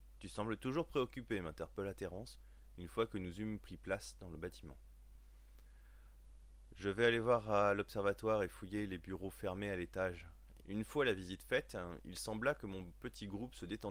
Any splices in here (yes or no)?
yes